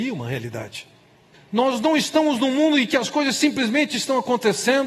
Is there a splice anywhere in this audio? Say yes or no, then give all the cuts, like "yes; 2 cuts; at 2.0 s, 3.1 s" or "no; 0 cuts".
yes; 1 cut; at 1.3 s